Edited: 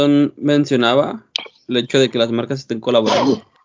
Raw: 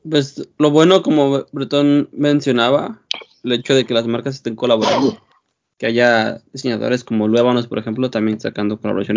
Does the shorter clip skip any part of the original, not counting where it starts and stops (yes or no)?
no